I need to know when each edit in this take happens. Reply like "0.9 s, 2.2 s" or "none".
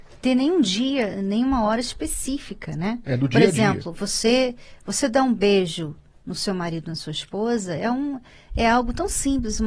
none